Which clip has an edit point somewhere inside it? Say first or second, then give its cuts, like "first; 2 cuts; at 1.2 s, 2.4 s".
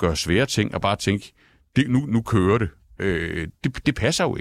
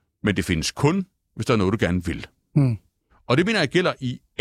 second; 1 cut; at 3.1 s